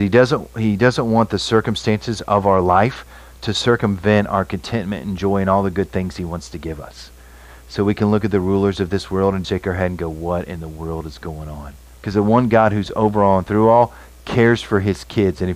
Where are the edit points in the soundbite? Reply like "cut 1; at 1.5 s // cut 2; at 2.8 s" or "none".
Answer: cut 1; at 9.4 s // cut 2; at 11.9 s